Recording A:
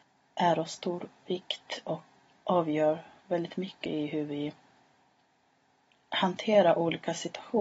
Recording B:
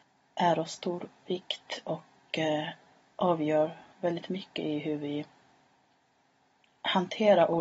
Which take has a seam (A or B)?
A